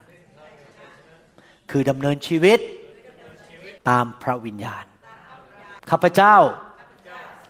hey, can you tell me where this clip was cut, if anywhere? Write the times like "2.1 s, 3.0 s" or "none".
3.8 s, 5.8 s